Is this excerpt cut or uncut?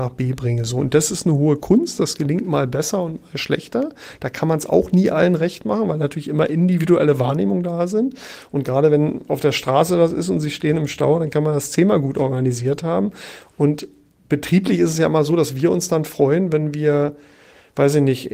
uncut